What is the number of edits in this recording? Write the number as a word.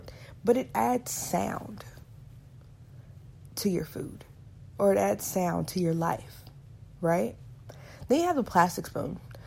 zero